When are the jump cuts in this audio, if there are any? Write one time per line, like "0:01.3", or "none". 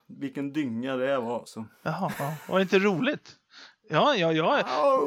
none

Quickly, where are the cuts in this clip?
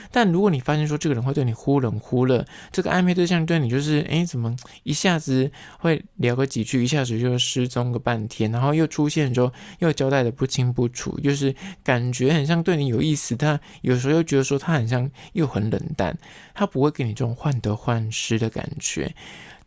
none

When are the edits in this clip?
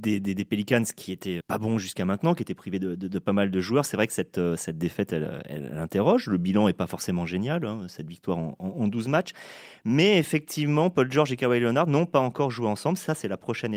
0:01.4

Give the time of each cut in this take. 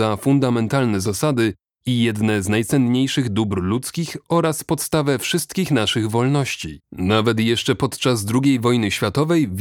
0:06.8

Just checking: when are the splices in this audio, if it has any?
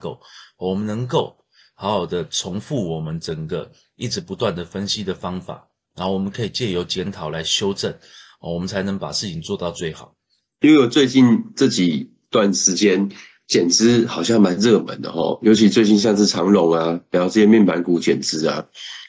0:10.5

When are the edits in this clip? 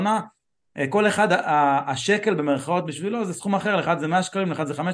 none

